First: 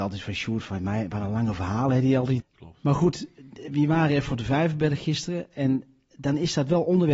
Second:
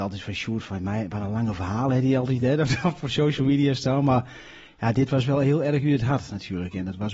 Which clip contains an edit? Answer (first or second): first